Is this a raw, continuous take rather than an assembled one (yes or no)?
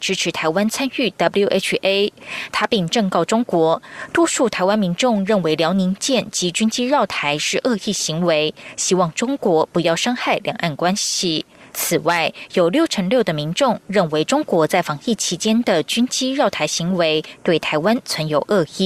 no